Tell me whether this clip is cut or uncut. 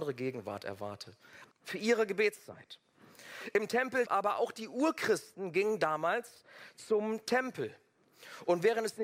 cut